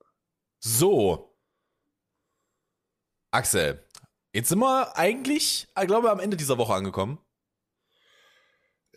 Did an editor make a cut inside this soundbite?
no; 0 cuts

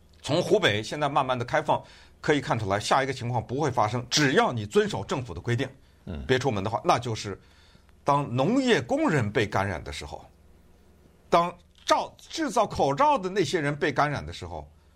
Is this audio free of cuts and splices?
yes; 0 cuts

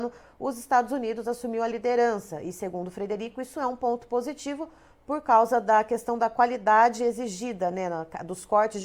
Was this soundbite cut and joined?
no; 0 cuts

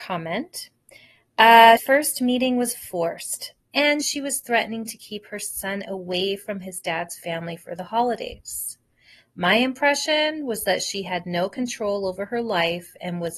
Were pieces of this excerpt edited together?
yes; 2 cuts; at 1.8 s, 3.7 s

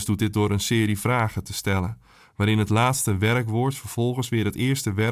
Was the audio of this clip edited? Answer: no; 0 cuts

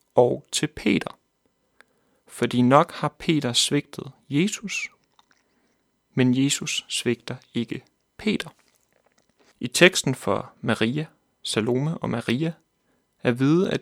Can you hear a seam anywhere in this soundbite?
yes; 1 cut; at 9.5 s

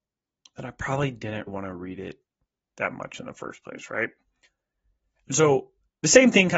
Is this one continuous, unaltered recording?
no; 1 cut; at 1.5 s

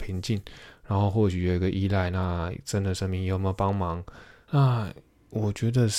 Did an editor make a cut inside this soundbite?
yes; 1 cut; at 4.5 s

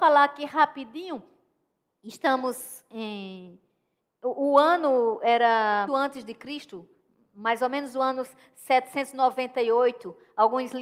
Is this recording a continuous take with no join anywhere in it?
no; 1 cut; at 5.9 s

